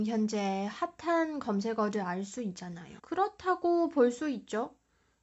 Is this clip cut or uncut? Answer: cut